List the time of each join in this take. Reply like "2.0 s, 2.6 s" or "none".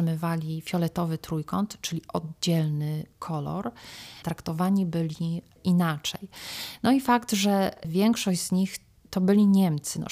4.2 s